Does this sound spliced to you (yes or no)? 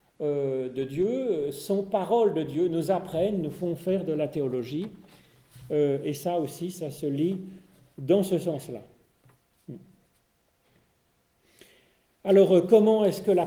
no